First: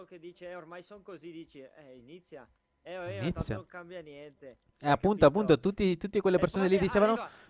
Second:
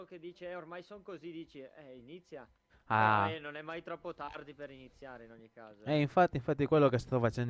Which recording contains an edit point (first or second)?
second